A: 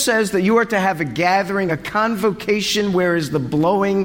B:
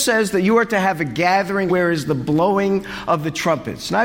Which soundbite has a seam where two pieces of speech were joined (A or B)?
B